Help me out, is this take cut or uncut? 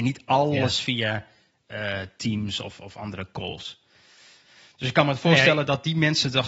uncut